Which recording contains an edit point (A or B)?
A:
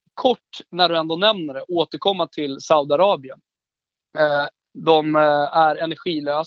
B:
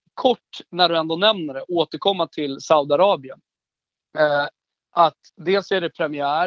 A